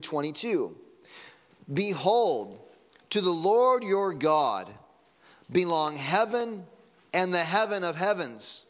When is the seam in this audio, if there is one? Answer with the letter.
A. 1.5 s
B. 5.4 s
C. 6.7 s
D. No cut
D